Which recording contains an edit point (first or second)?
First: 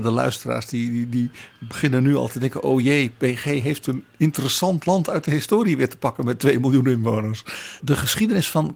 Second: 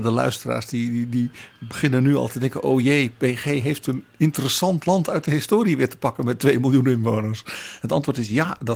first